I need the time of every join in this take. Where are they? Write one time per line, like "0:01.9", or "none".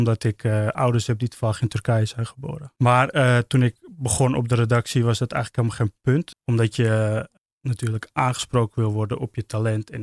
0:02.8
0:06.3